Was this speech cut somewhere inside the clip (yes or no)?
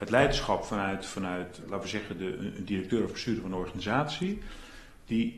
yes